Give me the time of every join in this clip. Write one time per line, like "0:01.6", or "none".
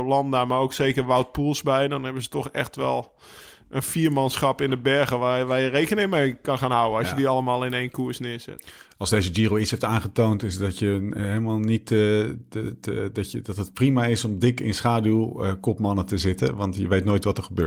none